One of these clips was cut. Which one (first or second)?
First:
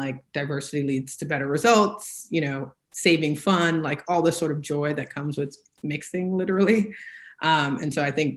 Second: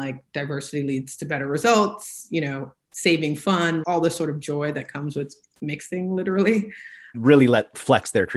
second